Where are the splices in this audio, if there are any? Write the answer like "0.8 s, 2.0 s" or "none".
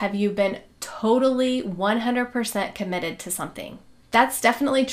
4.0 s